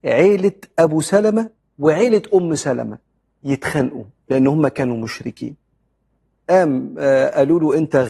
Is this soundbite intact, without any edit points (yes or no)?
yes